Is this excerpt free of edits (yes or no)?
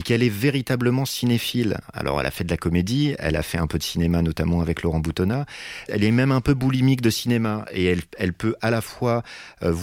no